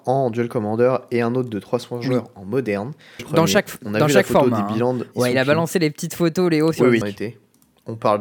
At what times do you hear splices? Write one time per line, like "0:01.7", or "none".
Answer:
0:03.2
0:07.0